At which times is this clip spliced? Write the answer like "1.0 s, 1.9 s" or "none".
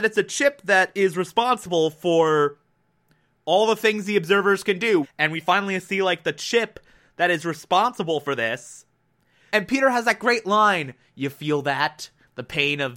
5.0 s, 9.5 s